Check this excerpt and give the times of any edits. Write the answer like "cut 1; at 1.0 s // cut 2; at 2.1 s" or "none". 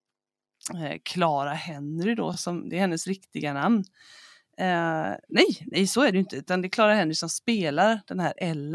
none